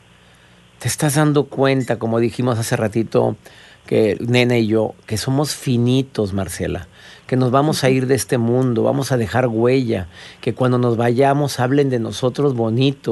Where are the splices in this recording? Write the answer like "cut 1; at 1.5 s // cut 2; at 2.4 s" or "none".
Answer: none